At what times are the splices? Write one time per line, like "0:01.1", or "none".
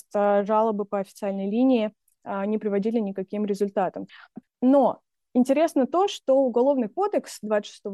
0:04.4